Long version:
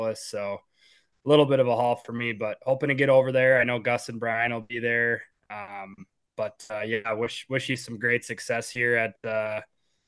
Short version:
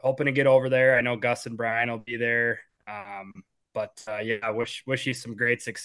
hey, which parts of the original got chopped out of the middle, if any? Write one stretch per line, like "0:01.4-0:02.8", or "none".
none

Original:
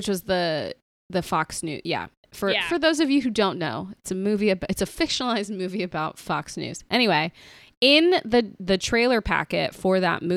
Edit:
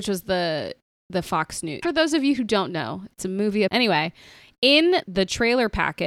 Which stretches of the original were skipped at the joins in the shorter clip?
0:01.8-0:02.7
0:04.5-0:06.9
0:08.2-0:08.6

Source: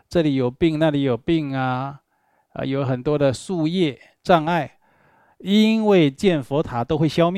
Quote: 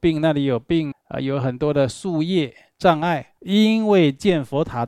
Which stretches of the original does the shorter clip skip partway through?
0:01.5-0:02.4
0:04.8-0:05.4

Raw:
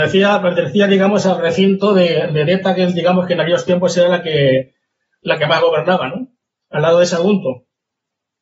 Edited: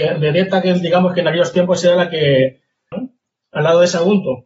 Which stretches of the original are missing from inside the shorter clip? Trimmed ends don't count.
0:05.0-0:06.1

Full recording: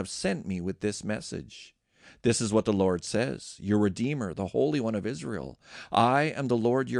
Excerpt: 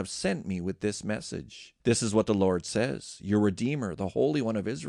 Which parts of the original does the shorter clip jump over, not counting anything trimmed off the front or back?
0:01.8-0:02.2

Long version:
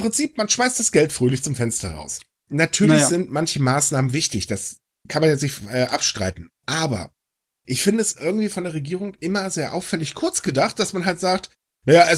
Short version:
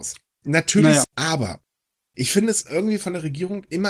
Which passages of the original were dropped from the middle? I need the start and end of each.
0:03.1-0:06.5

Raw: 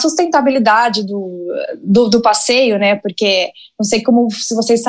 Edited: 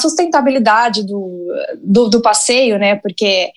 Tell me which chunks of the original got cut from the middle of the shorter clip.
none

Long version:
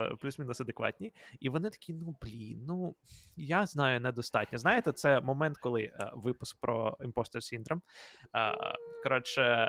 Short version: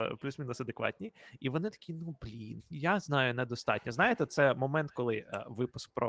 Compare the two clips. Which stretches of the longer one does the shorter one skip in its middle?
0:02.6-0:03.3

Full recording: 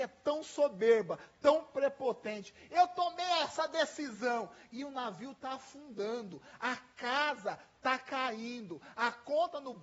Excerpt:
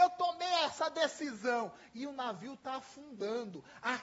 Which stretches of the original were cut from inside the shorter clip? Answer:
none

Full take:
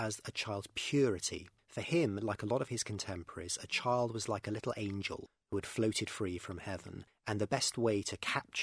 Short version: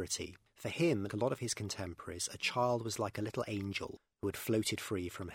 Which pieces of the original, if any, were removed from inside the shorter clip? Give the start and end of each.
0:02.2-0:02.4

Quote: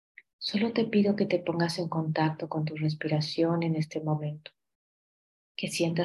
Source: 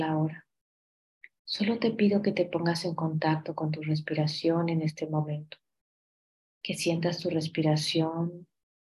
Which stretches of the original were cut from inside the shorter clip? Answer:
none

